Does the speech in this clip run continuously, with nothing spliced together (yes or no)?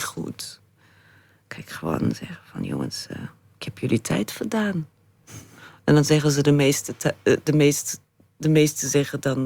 yes